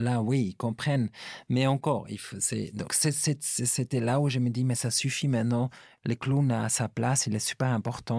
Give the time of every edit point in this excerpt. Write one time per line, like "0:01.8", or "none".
0:02.9